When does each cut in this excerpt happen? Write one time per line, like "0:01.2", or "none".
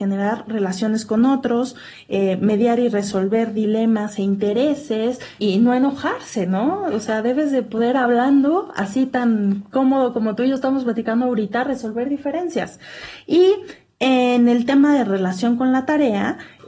0:05.4